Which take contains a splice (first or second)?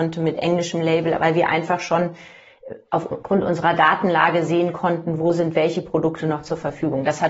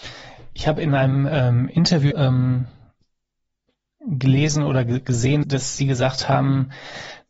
second